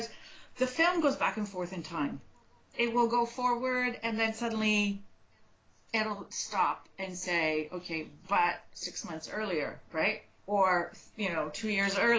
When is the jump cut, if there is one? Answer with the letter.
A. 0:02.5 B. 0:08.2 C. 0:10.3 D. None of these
D